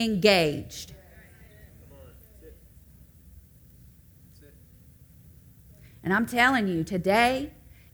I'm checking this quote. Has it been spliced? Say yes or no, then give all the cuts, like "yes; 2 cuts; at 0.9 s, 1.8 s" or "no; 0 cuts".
no; 0 cuts